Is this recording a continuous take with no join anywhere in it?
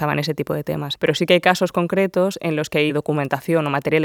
no; 1 cut; at 1.0 s

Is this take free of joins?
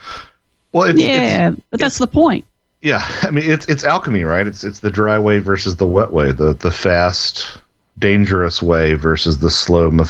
yes; 0 cuts

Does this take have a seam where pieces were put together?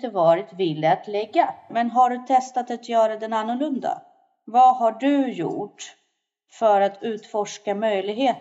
yes; 1 cut; at 1.7 s

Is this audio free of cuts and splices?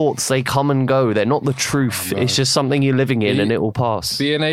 yes; 0 cuts

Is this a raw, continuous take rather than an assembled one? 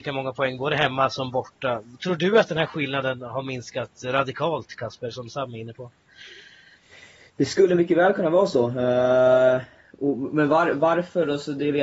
yes; 0 cuts

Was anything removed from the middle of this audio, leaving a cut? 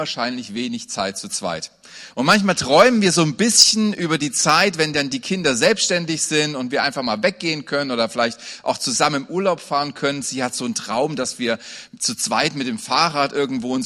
no; 0 cuts

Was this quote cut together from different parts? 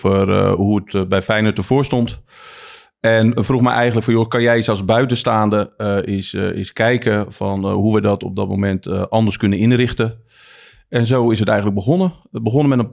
no; 0 cuts

